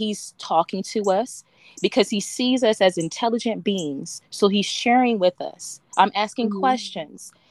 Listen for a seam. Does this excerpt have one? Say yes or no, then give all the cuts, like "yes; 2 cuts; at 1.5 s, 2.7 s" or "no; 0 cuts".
no; 0 cuts